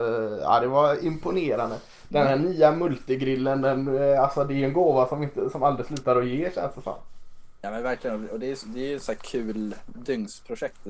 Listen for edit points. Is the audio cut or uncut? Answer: uncut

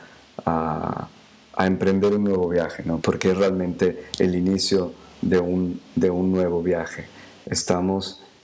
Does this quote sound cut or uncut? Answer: cut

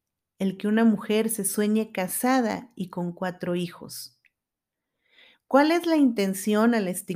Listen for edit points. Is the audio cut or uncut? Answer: uncut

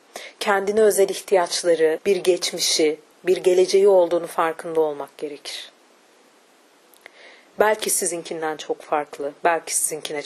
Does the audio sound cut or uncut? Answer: cut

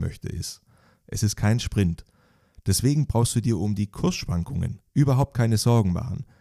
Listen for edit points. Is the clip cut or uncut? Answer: cut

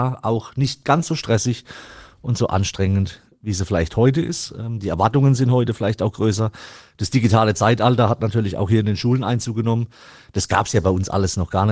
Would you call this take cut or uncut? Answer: uncut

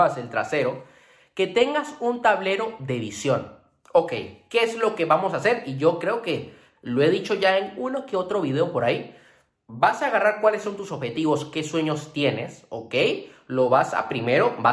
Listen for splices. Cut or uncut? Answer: uncut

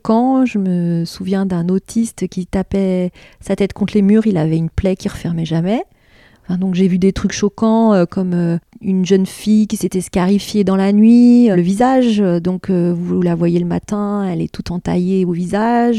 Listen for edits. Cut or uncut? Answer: cut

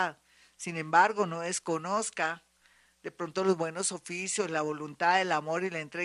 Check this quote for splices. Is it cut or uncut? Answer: uncut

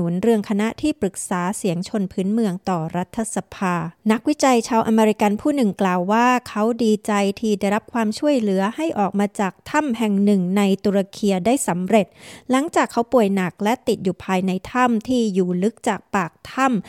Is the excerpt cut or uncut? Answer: cut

